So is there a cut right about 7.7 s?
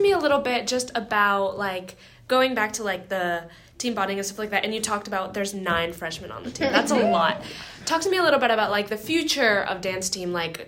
no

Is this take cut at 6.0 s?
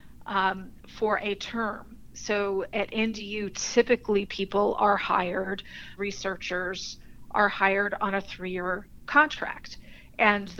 yes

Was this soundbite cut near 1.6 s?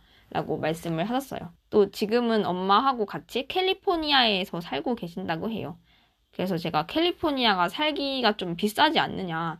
yes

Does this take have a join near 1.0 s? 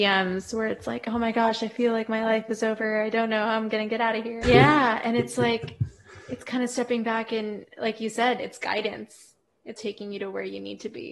no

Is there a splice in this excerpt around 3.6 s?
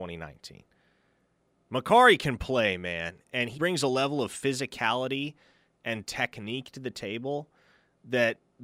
yes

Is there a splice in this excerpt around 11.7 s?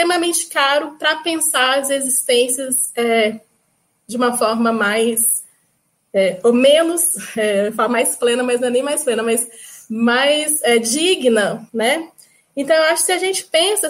yes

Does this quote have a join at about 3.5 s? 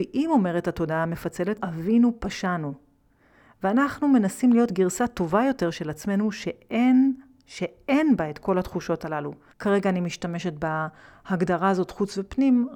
no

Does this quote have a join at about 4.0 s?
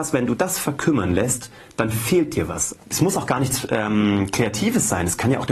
no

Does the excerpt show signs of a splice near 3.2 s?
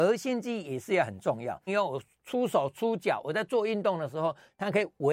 no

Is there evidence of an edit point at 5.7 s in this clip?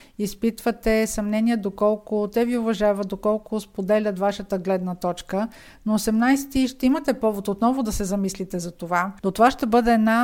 no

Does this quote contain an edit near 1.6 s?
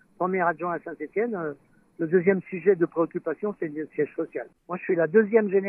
no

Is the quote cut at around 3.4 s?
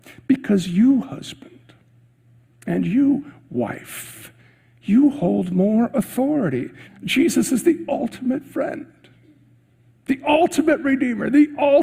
no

